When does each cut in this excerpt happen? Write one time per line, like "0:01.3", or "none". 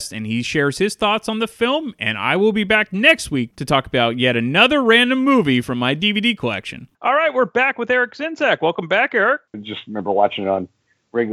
0:06.9
0:09.5